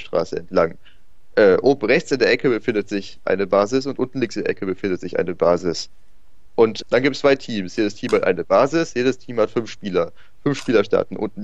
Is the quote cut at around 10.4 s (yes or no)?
no